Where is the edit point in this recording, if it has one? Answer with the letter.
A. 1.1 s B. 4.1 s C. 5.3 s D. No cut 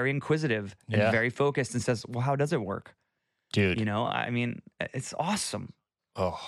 D